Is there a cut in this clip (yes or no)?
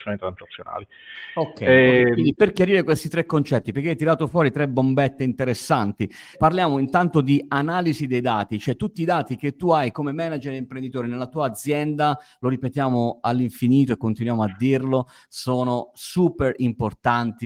yes